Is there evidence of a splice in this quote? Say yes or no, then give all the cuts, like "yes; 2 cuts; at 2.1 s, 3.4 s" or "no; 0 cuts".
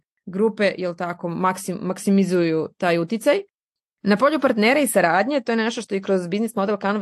yes; 1 cut; at 3.8 s